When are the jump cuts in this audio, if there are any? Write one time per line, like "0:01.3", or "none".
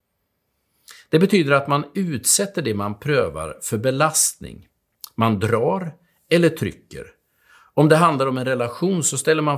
none